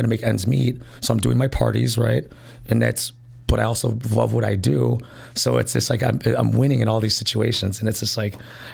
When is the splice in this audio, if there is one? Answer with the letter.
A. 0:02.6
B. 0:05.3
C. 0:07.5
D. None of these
D